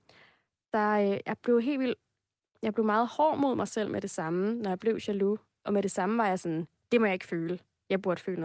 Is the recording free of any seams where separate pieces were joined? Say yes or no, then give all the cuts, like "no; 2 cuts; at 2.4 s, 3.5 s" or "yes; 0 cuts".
yes; 0 cuts